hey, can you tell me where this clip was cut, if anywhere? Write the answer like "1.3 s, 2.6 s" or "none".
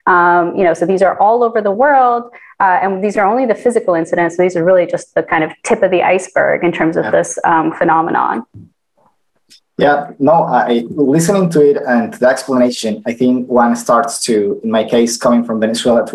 none